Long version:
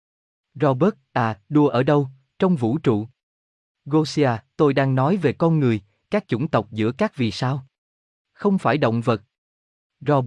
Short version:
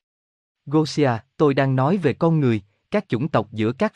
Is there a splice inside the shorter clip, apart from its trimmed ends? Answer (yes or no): no